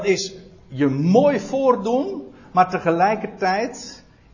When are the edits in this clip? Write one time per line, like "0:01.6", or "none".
none